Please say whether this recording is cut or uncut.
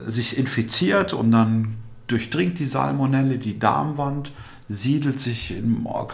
uncut